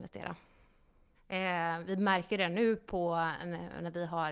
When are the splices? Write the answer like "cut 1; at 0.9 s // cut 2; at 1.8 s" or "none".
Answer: cut 1; at 1.1 s

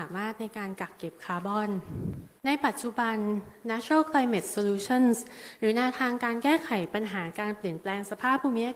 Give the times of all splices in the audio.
cut 1; at 2.4 s

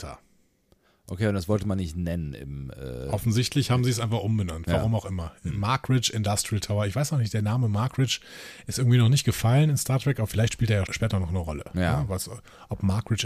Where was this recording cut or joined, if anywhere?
cut 1; at 10.9 s

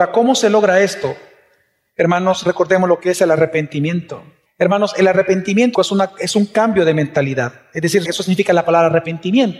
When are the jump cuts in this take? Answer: cut 1; at 4.5 s // cut 2; at 5.7 s // cut 3; at 8.0 s

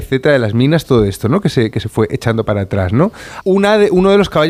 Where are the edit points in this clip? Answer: cut 1; at 3.4 s

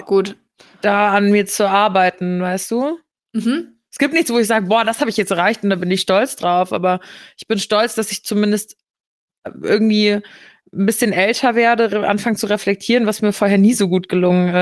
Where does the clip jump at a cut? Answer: none

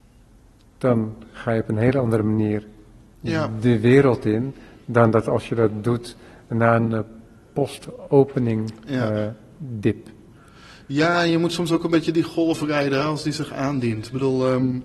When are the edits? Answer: none

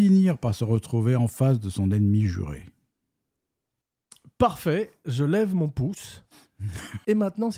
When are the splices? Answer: none

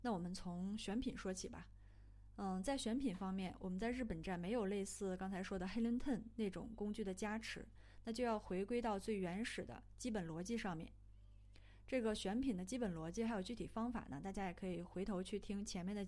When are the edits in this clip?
none

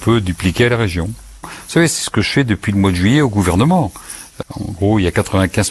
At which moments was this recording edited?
cut 1; at 1.4 s // cut 2; at 4.4 s

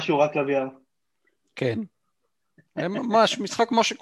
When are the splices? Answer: none

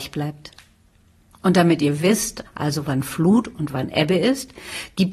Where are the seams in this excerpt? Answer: cut 1; at 2.5 s

